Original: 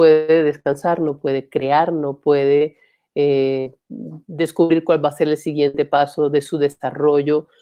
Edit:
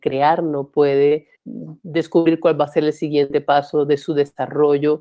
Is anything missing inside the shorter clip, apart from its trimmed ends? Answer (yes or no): yes